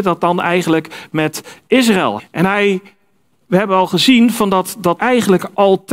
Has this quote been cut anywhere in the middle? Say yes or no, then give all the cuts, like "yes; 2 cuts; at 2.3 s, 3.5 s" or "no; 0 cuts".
yes; 2 cuts; at 2.2 s, 5.0 s